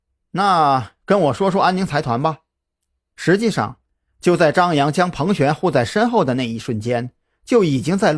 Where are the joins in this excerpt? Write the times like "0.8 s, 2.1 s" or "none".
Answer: 3.1 s